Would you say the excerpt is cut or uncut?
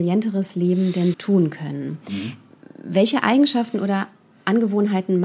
cut